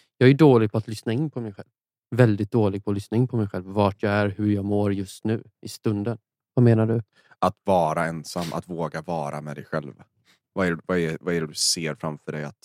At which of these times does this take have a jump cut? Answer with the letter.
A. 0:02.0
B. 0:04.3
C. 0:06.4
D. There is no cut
C